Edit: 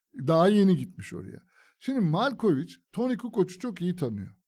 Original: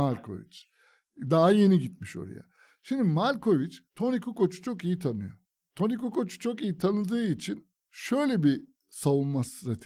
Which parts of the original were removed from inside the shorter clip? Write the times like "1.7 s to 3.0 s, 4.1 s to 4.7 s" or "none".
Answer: none